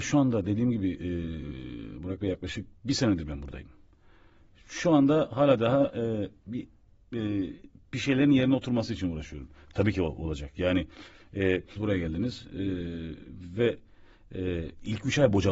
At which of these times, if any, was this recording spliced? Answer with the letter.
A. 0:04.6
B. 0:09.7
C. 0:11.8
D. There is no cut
C